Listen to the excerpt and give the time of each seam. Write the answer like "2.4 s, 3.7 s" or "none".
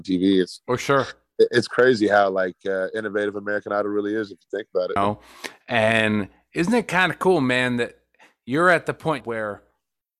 5.0 s, 9.2 s

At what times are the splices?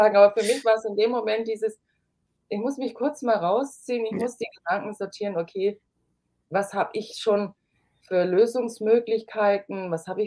6.4 s

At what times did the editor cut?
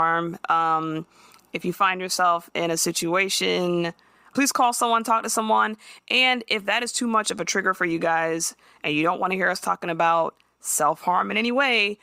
none

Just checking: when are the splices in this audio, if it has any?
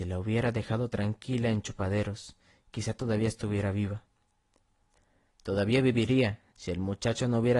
6.5 s

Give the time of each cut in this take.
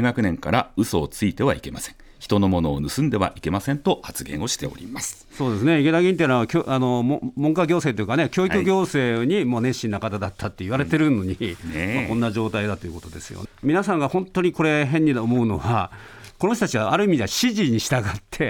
13.5 s

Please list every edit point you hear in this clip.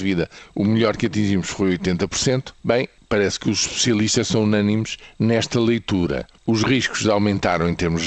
2.6 s

